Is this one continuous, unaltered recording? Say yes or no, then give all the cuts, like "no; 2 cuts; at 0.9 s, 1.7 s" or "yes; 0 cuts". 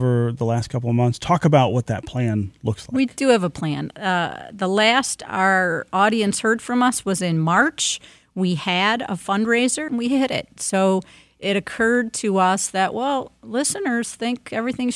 no; 1 cut; at 9.9 s